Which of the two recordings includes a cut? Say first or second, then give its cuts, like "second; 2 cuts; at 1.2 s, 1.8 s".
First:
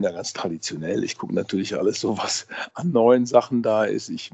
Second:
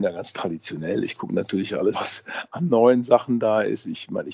second; 1 cut; at 1.9 s